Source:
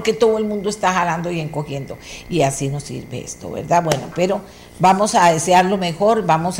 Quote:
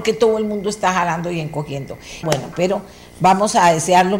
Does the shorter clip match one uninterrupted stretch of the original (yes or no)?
no